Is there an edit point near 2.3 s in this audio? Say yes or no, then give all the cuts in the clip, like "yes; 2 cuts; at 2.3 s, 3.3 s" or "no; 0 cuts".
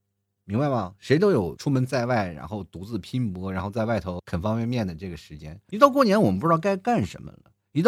no; 1 cut; at 5.7 s